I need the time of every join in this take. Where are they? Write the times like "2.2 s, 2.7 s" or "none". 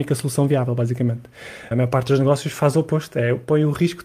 1.7 s